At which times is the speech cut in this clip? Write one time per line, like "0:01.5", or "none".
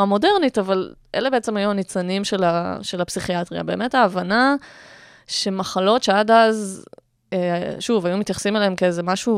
none

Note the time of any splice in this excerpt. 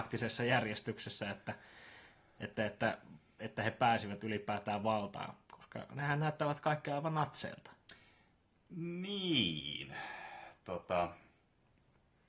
none

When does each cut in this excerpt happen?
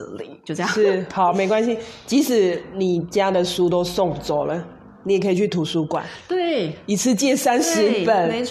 none

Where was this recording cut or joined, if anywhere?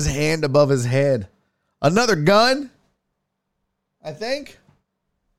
none

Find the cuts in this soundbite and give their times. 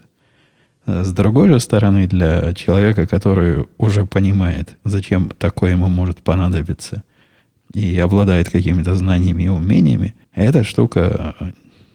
0:10.2

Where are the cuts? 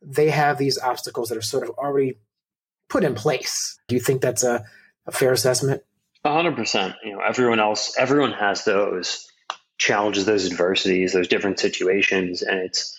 0:03.9

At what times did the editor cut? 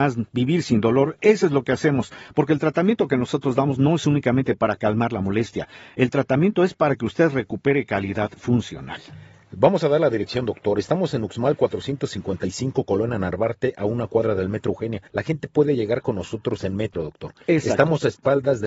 0:15.1
0:16.9

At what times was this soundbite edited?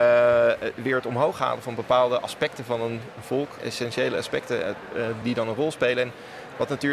0:03.6
0:05.2

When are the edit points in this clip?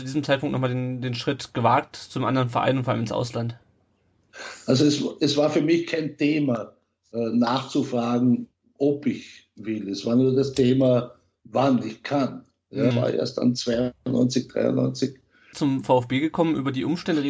0:12.9
0:15.5

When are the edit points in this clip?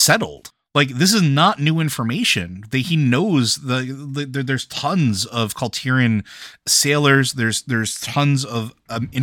none

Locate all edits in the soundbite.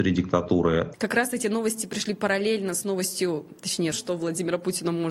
0:00.9
0:03.9

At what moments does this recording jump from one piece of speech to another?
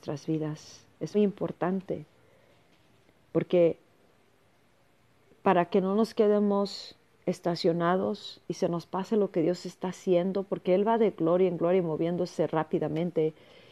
0:01.1
0:08.4

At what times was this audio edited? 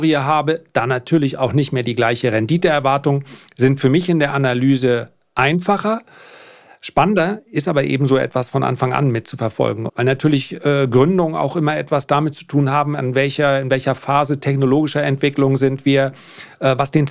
0:09.9

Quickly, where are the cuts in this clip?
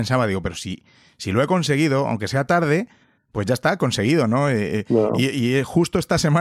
none

